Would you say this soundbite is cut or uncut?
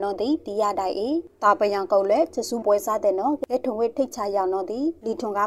cut